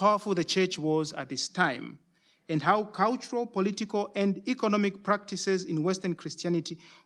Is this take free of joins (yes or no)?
yes